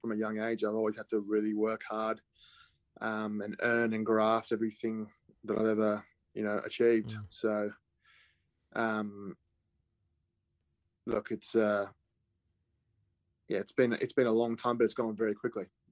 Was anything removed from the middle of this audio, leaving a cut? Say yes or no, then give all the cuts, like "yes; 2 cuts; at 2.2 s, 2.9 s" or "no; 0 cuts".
no; 0 cuts